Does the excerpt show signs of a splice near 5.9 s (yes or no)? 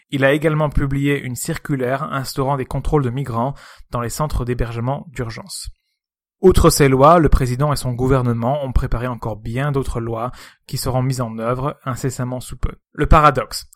no